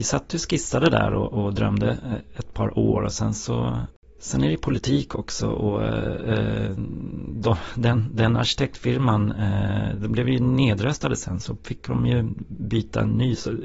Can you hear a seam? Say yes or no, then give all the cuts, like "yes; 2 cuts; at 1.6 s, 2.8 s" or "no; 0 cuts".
no; 0 cuts